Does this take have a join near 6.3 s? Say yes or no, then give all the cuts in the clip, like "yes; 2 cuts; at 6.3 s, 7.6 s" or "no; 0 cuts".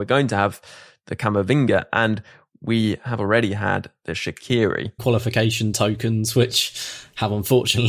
no; 1 cut; at 5.0 s